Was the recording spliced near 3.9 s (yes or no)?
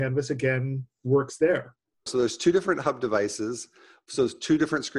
no